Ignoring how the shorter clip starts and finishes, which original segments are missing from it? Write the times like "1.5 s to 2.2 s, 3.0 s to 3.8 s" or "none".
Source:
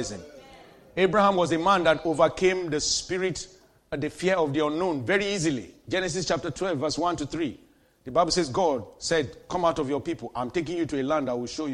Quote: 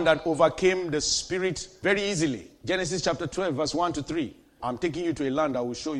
3.6 s to 5.1 s, 7.8 s to 10.3 s